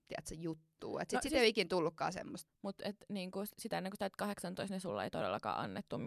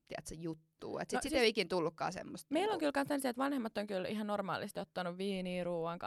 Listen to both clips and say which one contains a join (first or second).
first